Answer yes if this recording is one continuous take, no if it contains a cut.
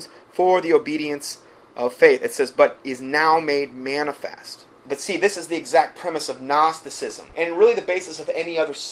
no